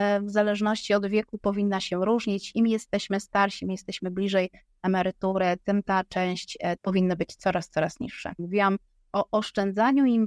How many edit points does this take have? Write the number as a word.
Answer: two